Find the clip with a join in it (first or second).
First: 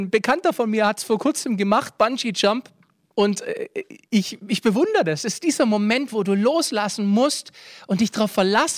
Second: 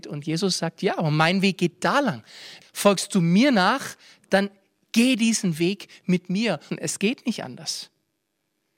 second